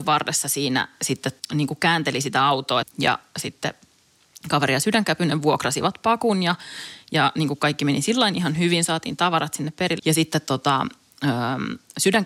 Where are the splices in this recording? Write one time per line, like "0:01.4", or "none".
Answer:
0:02.8
0:10.0